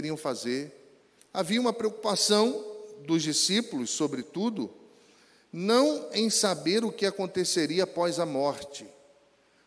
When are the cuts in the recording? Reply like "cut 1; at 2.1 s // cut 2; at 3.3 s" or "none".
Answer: cut 1; at 1.2 s